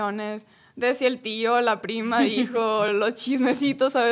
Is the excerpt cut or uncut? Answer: uncut